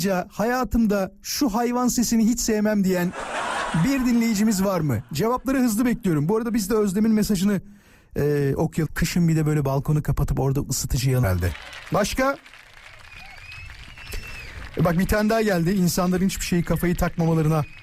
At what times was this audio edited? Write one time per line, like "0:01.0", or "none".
0:08.9